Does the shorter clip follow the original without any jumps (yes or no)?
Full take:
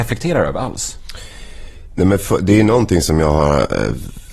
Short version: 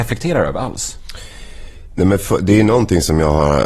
yes